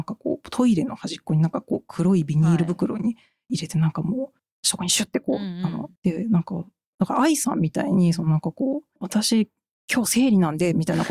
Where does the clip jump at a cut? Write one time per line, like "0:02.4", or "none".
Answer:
0:06.0